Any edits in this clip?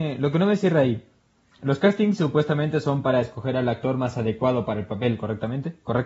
no; 0 cuts

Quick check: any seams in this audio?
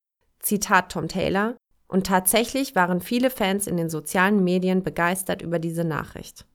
yes; 1 cut; at 1.7 s

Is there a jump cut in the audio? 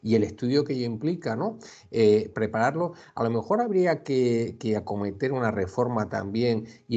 yes; 1 cut; at 2.3 s

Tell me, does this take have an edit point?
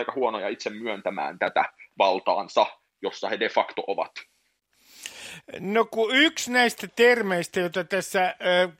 no; 0 cuts

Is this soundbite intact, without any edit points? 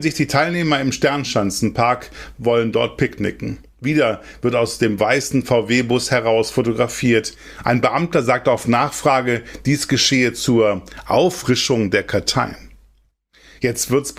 yes; 0 cuts

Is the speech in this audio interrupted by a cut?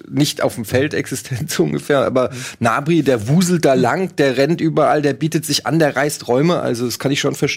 no; 0 cuts

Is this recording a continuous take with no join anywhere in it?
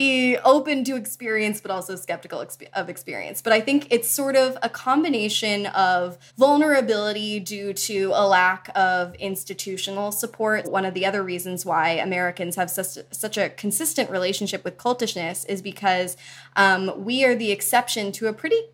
no; 2 cuts; at 6.3 s, 10.6 s

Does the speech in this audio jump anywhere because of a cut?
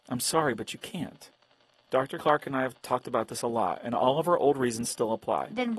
no; 0 cuts

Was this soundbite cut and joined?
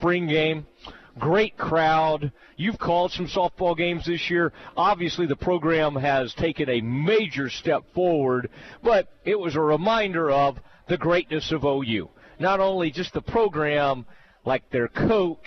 no; 0 cuts

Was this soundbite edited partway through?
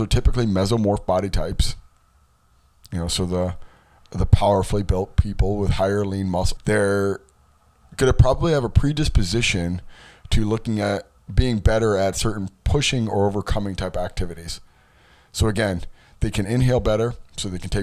yes; 1 cut; at 6.6 s

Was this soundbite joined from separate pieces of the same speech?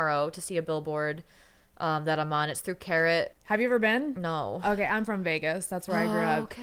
yes; 1 cut; at 3.3 s

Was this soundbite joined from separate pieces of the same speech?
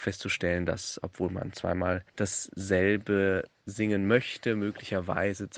yes; 1 cut; at 2.1 s

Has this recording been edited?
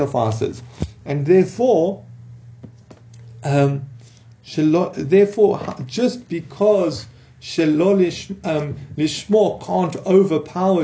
no; 0 cuts

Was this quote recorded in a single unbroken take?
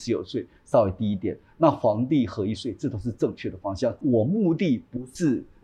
no; 1 cut; at 4.0 s

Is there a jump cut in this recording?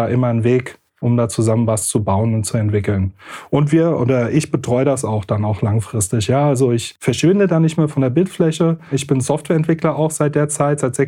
yes; 1 cut; at 8.9 s

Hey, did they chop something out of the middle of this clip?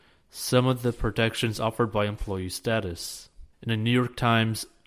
yes; 1 cut; at 3.5 s

